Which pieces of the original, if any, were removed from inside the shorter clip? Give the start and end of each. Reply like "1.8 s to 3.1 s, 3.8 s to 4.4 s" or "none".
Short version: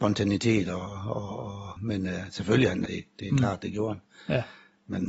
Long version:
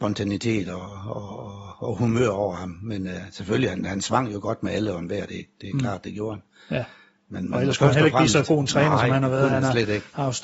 1.8 s to 2.8 s, 3.9 s to 5.3 s